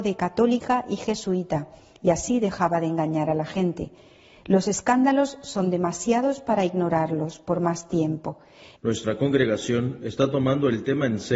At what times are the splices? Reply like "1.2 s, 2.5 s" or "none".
8.8 s